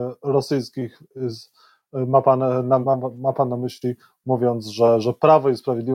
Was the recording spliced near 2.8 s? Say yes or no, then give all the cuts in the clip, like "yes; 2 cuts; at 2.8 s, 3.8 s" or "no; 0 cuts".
yes; 1 cut; at 2.8 s